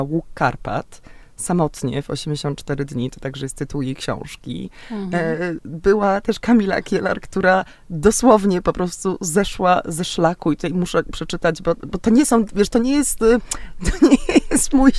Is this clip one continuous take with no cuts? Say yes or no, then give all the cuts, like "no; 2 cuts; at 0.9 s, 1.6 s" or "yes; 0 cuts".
yes; 0 cuts